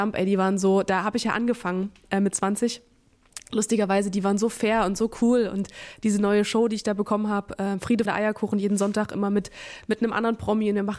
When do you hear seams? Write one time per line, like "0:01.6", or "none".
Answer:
0:08.0